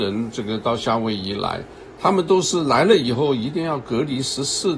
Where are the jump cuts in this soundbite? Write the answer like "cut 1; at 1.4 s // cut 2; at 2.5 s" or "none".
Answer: none